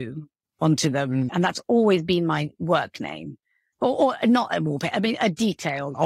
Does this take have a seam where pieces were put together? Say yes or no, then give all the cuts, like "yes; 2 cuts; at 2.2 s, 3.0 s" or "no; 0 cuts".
yes; 2 cuts; at 1.3 s, 3.7 s